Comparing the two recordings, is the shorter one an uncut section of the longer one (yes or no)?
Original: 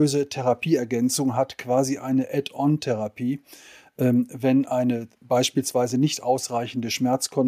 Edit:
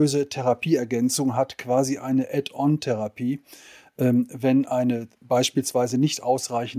yes